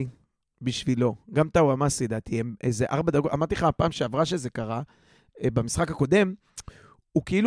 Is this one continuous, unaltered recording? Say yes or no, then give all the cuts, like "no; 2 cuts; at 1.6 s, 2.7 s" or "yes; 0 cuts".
yes; 0 cuts